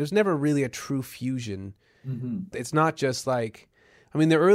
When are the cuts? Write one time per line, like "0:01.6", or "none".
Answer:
0:02.5